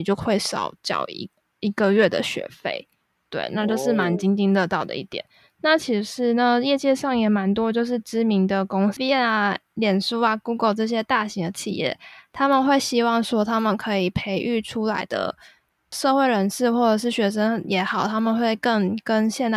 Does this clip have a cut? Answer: no; 0 cuts

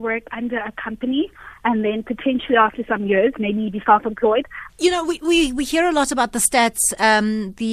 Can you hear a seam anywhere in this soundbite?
yes; 1 cut; at 4.7 s

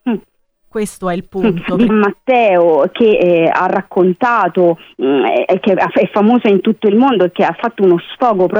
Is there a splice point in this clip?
yes; 1 cut; at 1.9 s

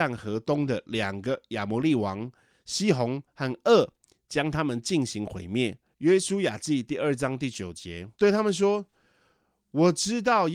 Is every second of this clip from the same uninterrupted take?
no; 2 cuts; at 5.9 s, 8.1 s

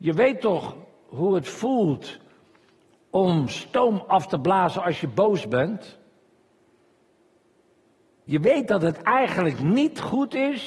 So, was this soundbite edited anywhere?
no; 0 cuts

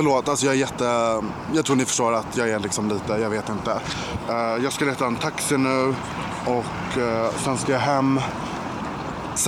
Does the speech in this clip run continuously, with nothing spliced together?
yes; 0 cuts

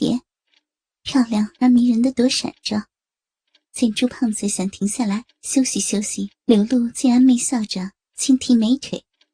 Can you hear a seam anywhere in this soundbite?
yes; 2 cuts; at 3.6 s, 6.3 s

